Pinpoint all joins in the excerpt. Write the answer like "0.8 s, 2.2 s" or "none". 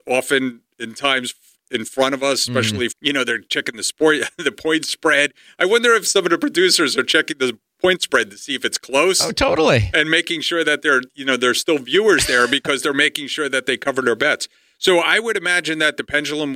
2.9 s